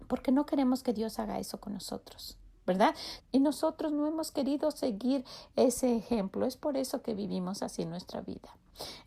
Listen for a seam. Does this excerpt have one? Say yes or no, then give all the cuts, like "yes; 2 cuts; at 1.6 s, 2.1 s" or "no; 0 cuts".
yes; 1 cut; at 3.2 s